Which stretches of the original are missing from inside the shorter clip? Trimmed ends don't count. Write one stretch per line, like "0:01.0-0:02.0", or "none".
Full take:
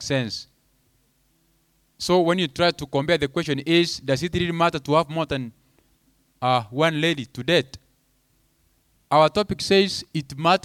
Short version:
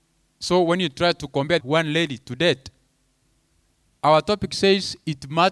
0:03.2-0:06.7